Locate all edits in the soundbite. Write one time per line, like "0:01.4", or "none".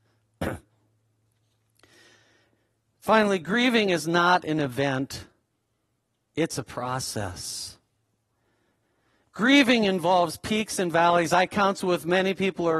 none